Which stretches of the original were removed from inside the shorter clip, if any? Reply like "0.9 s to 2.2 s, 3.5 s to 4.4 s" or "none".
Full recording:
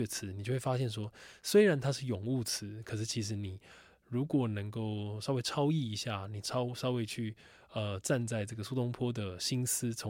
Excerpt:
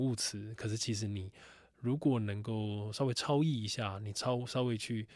none